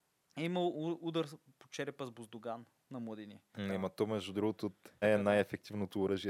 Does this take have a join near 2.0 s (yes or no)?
no